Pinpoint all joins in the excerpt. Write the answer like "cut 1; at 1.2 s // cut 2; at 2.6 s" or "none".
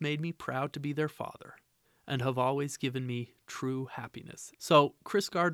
cut 1; at 4.5 s